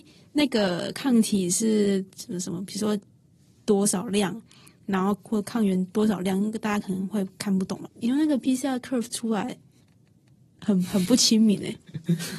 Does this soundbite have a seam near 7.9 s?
yes; 1 cut; at 7.9 s

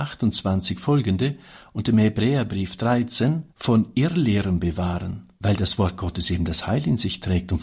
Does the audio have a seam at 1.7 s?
no; 2 cuts; at 3.5 s, 5.3 s

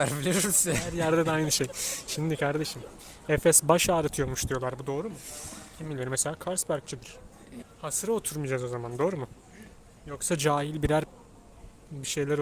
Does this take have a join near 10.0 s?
no; 1 cut; at 7.6 s

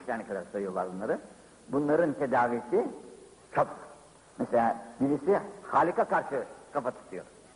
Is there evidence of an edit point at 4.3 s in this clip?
yes; 1 cut; at 4.3 s

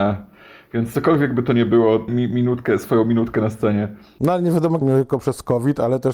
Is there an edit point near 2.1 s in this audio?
yes; 2 cuts; at 2.1 s, 4.8 s

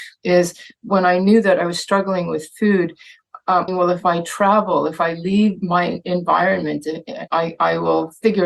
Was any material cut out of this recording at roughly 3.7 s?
yes; 2 cuts; at 3.7 s, 7.3 s

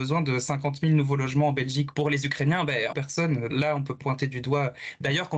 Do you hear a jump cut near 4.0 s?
yes; 2 cuts; at 2.9 s, 4.0 s

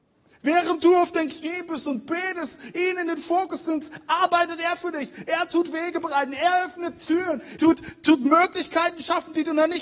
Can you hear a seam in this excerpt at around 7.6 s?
yes; 1 cut; at 7.6 s

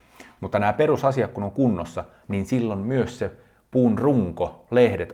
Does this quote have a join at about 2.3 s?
no; 0 cuts

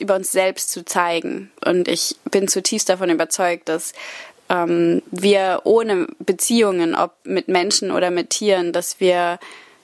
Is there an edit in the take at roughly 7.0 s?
no; 1 cut; at 1.6 s

